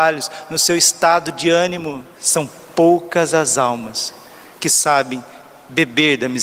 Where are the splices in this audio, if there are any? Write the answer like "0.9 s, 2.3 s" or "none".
2.1 s